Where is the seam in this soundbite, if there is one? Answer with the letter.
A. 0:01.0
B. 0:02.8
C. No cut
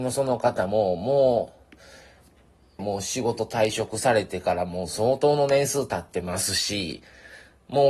B